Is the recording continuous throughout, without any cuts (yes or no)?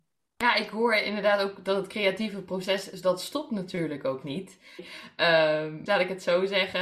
no